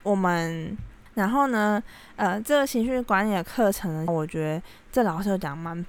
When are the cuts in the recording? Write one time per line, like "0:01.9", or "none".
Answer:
0:01.1
0:04.1